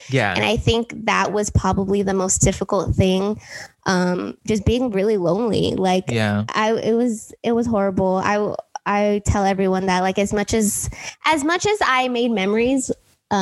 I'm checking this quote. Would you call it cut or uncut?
uncut